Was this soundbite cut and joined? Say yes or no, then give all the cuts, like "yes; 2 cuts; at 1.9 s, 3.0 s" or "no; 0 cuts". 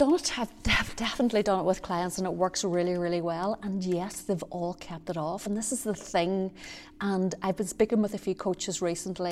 no; 0 cuts